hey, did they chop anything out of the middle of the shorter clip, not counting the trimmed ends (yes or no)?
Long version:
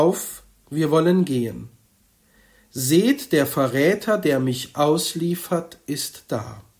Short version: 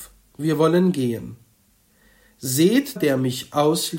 yes